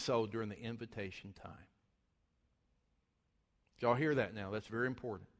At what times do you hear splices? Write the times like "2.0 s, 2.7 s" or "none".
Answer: none